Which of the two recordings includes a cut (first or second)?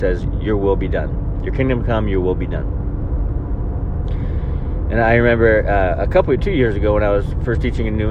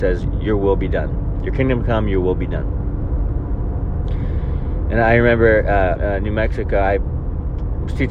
second